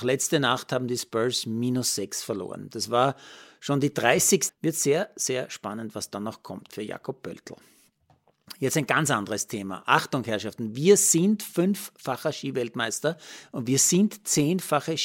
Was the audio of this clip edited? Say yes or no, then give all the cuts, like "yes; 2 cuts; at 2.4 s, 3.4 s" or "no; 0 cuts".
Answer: yes; 1 cut; at 4.5 s